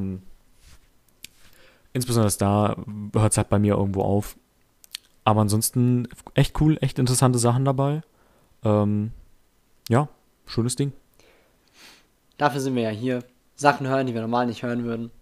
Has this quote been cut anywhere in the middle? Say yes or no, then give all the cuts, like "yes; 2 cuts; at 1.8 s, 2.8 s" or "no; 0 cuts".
no; 0 cuts